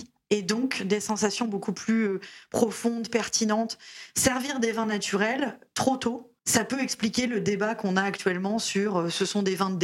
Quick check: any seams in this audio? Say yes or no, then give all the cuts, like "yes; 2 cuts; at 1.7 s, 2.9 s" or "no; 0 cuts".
yes; 1 cut; at 6.4 s